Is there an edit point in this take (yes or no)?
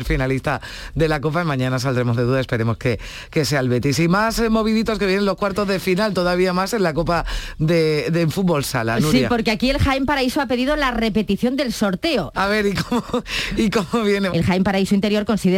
yes